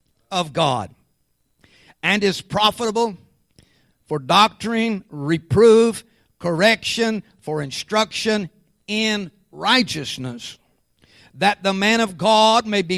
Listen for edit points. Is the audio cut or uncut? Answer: uncut